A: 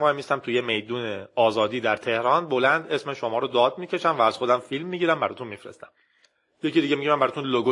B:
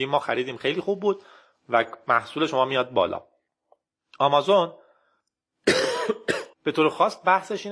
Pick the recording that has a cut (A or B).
B